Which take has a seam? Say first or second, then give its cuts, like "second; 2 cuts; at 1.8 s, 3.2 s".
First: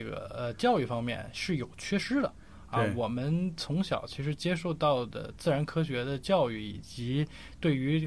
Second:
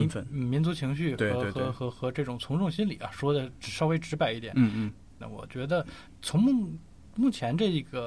second; 1 cut; at 5.2 s